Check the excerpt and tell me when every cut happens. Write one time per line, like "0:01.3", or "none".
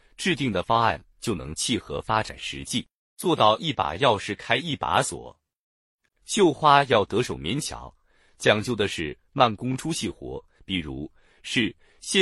0:06.1
0:10.6